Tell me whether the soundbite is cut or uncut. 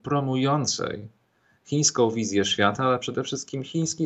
uncut